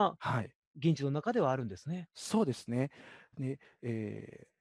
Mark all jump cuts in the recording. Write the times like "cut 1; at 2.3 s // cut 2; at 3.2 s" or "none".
none